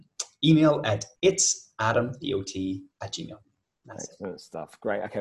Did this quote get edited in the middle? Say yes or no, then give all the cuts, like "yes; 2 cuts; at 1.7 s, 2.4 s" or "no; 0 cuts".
yes; 2 cuts; at 1.1 s, 2.9 s